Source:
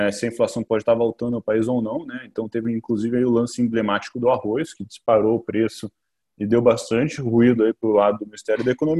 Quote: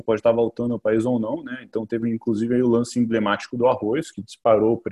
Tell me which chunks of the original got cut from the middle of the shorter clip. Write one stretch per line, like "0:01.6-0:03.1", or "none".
none